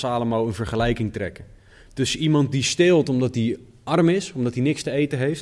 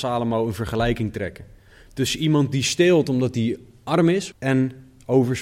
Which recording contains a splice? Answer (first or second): second